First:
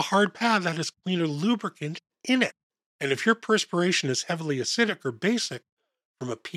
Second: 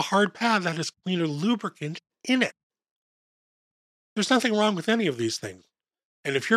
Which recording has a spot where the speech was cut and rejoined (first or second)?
first